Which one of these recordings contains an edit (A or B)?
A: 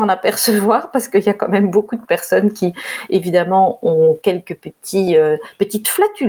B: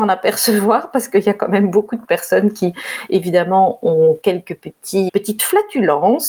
B